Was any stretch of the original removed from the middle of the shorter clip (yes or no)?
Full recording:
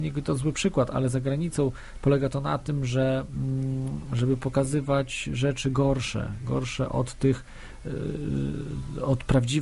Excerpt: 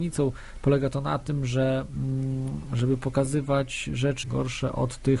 yes